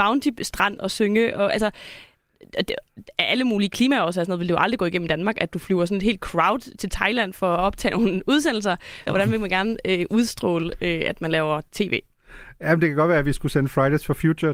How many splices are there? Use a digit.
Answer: 1